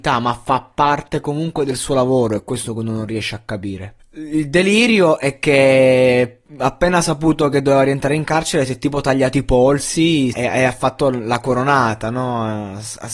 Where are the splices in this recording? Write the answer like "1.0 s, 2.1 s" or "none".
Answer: 4.0 s, 10.3 s